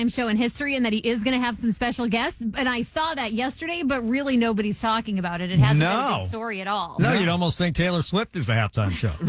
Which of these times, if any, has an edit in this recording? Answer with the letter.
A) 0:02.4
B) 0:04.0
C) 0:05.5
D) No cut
D